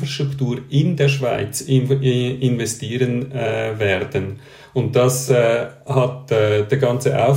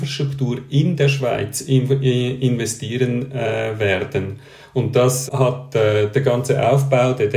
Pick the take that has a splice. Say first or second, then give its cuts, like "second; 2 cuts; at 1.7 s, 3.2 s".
second; 1 cut; at 5.3 s